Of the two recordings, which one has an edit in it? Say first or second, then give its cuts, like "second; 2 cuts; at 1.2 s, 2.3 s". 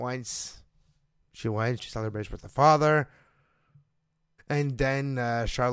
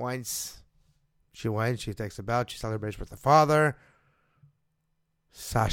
first; 2 cuts; at 1.8 s, 4.4 s